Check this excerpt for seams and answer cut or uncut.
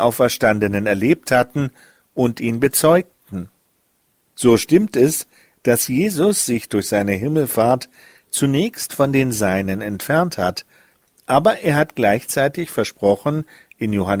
uncut